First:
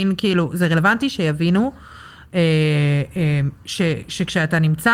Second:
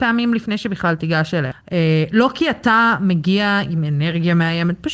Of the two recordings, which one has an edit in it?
second; 1 cut; at 1.5 s

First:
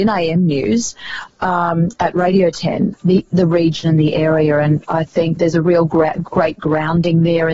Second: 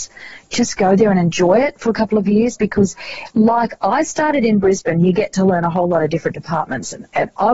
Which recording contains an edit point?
first; 2 cuts; at 2.9 s, 5.4 s

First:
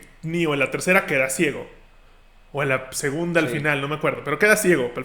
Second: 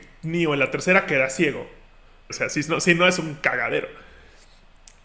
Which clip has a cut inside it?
second; 1 cut; at 2.3 s

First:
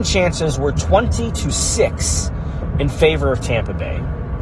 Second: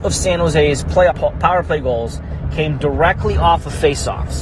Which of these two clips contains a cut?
second; 1 cut; at 1.1 s

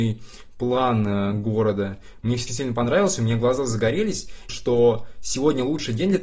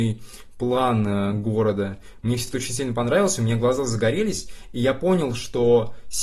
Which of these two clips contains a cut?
first; 2 cuts; at 2.5 s, 4.5 s

